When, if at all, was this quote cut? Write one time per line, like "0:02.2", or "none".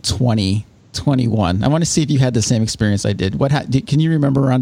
none